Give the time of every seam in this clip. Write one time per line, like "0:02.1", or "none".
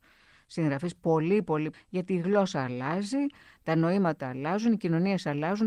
0:01.7